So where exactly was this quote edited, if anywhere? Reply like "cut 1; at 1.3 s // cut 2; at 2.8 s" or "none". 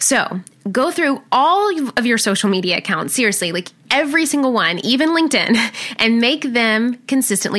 none